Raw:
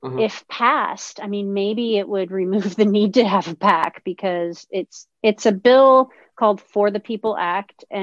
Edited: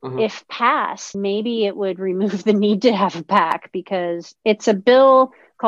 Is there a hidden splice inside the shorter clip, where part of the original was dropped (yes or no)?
yes